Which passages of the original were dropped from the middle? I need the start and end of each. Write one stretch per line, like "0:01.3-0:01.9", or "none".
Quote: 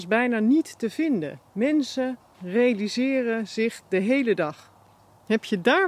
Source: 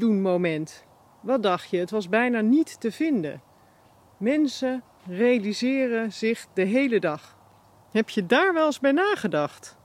0:03.5-0:04.1